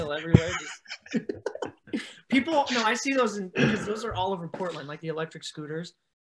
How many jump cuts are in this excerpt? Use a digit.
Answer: 0